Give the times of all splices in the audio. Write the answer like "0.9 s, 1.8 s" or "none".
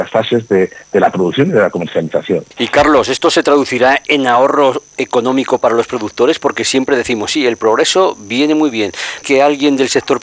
2.5 s, 9.2 s